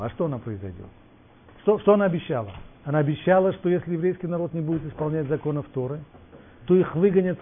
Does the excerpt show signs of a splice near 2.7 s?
yes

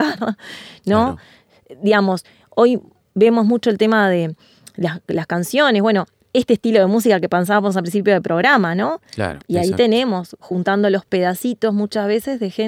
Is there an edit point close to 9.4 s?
yes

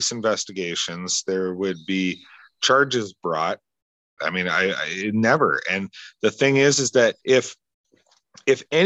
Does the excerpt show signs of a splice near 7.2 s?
yes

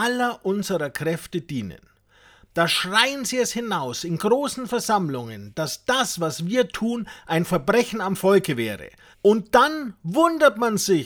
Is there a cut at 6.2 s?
no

